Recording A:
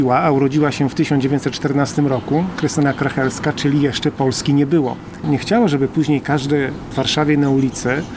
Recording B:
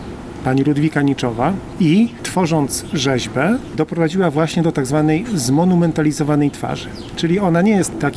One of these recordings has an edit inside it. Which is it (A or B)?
A